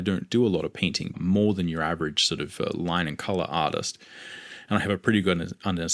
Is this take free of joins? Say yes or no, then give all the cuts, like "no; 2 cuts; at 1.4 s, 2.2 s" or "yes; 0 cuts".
no; 1 cut; at 1.1 s